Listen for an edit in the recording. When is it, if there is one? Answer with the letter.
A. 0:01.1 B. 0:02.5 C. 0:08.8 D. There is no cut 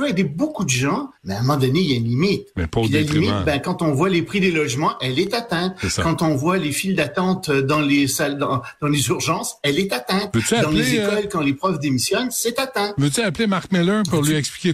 A